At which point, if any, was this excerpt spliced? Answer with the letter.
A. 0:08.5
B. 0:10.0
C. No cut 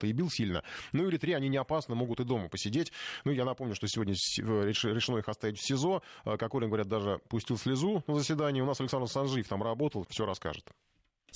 B